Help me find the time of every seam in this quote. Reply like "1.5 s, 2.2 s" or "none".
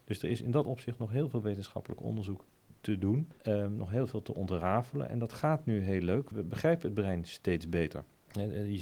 6.3 s